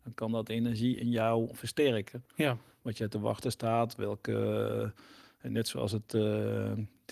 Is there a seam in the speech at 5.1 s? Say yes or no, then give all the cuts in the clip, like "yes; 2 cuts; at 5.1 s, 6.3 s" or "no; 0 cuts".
no; 1 cut; at 2.3 s